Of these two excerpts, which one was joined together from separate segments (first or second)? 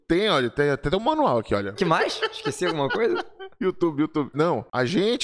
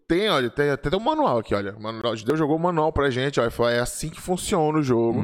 first